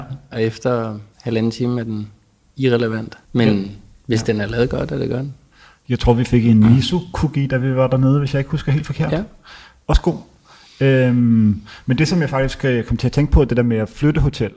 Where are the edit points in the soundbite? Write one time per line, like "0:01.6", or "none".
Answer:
0:01.1
0:03.2